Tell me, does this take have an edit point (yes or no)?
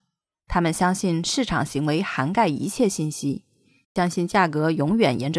no